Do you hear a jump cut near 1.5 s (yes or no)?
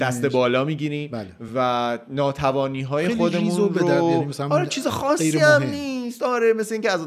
no